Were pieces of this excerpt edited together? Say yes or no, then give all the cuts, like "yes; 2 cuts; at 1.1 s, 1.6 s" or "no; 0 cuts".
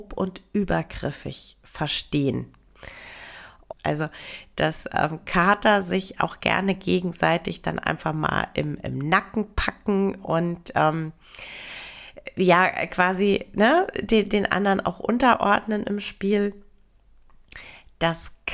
yes; 1 cut; at 3.7 s